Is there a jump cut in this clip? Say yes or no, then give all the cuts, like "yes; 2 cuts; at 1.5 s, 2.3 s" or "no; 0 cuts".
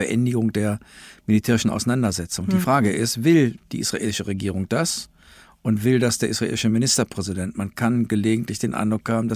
no; 0 cuts